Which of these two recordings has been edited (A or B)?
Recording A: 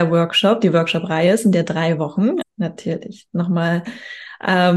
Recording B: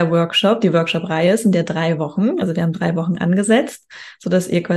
A